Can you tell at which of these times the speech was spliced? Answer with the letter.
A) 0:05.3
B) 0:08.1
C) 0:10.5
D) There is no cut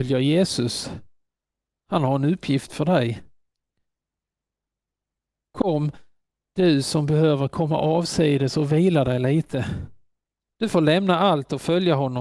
C